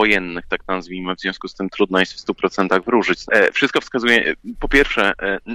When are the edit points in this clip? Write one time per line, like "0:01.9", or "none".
0:03.3